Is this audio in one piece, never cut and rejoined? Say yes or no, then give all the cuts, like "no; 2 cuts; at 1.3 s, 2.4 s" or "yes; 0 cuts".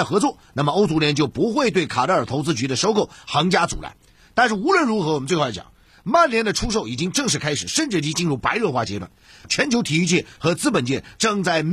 yes; 0 cuts